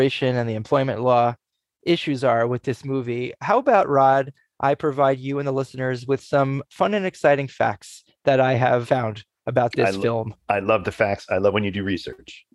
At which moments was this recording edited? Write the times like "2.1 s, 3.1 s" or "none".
none